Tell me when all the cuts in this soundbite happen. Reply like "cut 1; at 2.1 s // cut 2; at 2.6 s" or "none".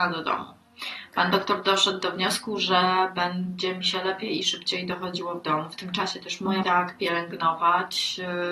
cut 1; at 6.6 s

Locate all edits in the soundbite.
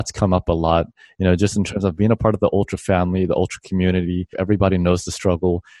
cut 1; at 4.3 s

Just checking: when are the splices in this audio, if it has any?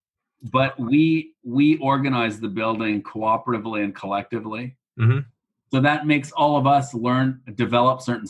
none

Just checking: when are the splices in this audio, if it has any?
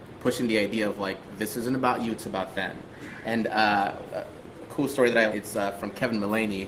cut 1; at 4.1 s // cut 2; at 5.3 s

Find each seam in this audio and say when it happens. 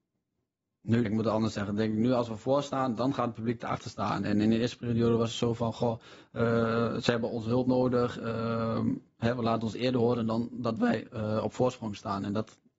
cut 1; at 1.1 s

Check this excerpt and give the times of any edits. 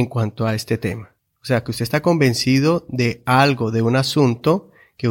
cut 1; at 1.3 s

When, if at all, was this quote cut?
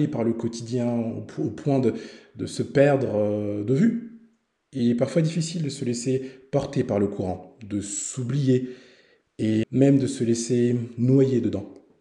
cut 1; at 9.6 s

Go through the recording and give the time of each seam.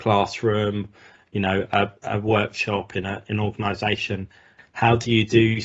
cut 1; at 4.6 s

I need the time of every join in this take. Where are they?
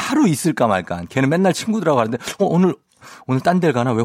none

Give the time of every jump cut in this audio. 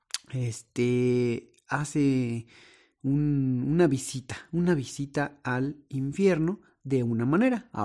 none

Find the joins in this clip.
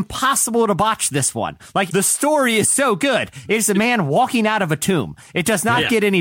cut 1; at 1.9 s

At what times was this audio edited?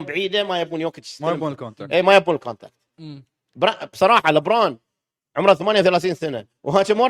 none

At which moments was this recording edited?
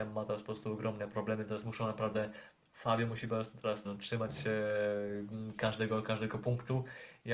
cut 1; at 3.8 s

